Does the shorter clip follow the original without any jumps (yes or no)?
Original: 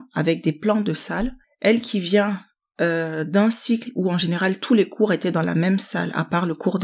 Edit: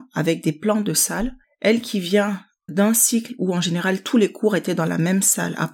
no